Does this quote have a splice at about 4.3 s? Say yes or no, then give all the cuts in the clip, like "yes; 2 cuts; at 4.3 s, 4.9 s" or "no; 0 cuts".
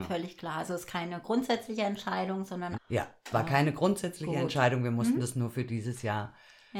no; 1 cut; at 2.7 s